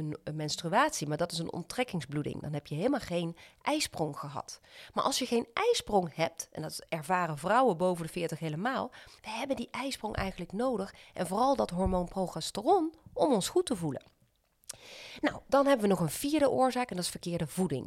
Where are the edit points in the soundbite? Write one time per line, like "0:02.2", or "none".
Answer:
0:09.2